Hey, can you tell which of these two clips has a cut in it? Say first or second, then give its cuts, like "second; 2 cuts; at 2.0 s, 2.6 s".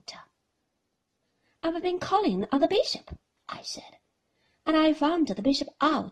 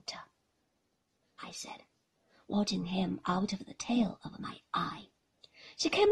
second; 1 cut; at 1.4 s